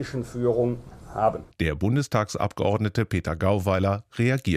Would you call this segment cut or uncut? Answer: cut